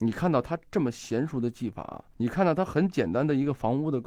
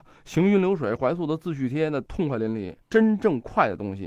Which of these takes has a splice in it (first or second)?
second